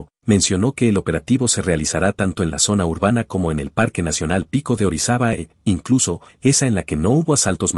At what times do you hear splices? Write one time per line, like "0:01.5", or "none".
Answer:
0:06.3